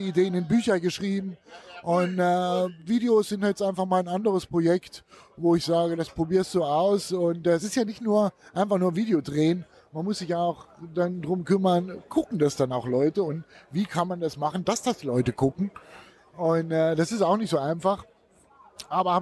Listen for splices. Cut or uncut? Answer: uncut